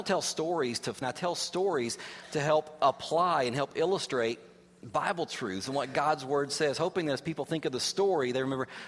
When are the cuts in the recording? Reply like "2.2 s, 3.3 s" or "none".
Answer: 1.0 s